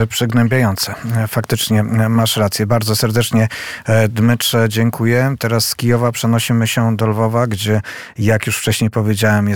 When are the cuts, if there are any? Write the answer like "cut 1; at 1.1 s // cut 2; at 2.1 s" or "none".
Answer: none